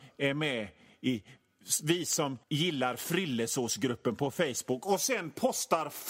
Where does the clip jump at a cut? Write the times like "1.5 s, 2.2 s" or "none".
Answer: 2.4 s